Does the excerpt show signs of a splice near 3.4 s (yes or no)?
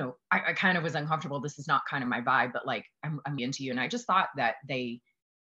yes